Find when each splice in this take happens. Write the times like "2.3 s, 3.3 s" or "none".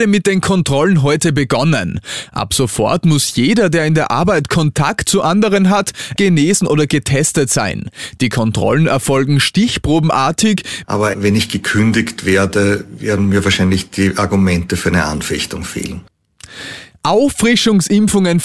6.2 s, 10.8 s